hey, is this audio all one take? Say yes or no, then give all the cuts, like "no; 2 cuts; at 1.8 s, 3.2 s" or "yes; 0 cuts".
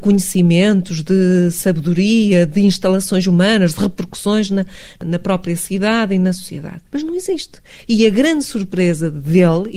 no; 1 cut; at 6.9 s